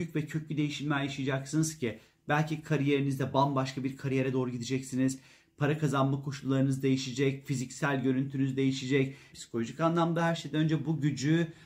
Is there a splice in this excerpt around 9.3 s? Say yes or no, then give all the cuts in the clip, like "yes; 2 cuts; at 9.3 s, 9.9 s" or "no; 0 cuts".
yes; 1 cut; at 9.3 s